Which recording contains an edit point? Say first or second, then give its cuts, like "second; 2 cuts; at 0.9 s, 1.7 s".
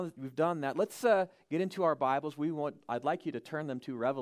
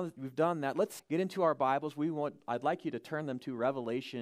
second; 1 cut; at 1.0 s